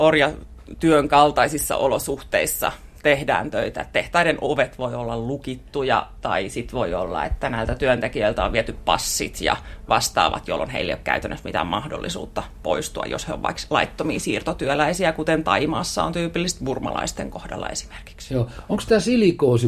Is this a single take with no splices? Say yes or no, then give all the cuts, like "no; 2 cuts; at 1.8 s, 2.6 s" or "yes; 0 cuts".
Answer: yes; 0 cuts